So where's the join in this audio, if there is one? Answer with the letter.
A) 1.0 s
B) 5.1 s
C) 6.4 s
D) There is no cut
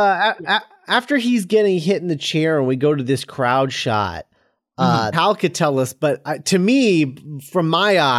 B